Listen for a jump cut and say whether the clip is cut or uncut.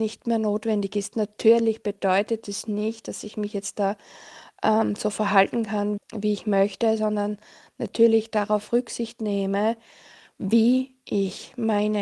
cut